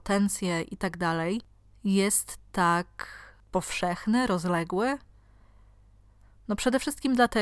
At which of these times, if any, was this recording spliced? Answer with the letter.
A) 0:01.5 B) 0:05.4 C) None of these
C